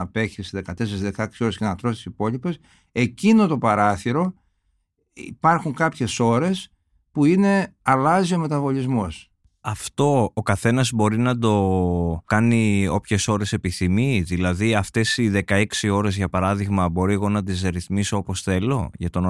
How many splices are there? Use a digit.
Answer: 0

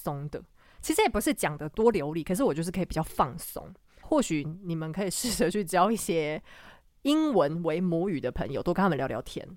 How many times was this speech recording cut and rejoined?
1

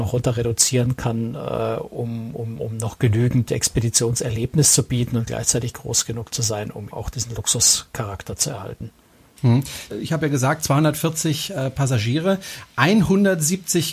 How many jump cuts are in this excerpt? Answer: 2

